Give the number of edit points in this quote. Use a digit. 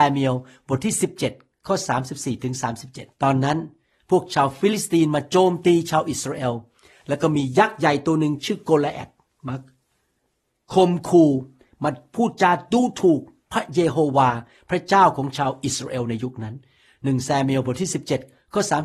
1